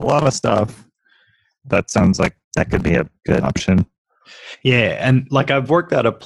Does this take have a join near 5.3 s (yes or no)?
no